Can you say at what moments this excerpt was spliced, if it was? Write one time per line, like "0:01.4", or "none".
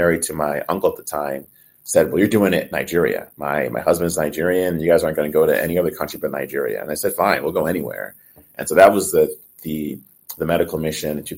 none